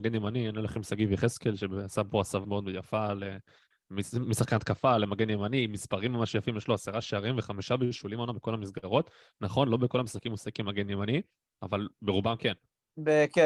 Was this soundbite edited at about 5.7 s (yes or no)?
no